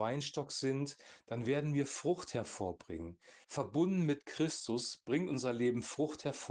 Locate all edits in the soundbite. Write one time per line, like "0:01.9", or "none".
none

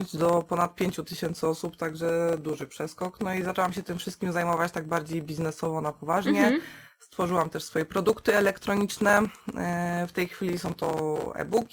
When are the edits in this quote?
none

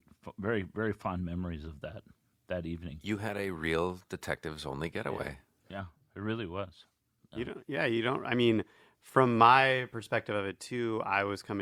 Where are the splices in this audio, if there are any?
none

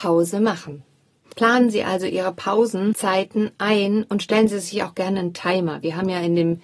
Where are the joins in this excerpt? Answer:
0:01.2

